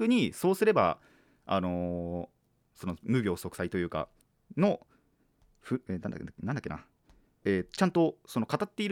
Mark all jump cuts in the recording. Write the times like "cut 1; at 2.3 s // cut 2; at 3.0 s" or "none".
cut 1; at 7.4 s